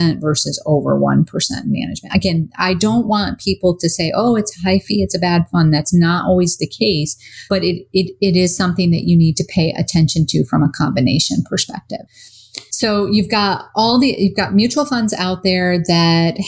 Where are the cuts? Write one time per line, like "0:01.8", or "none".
none